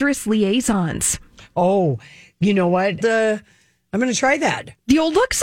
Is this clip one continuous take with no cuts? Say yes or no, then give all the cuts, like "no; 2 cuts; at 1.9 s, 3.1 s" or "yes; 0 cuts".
no; 1 cut; at 3.0 s